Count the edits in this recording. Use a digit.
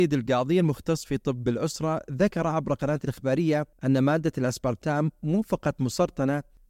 1